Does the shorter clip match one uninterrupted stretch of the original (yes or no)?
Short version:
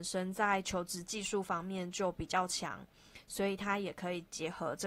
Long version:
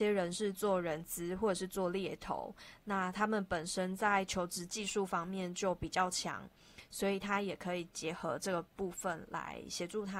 yes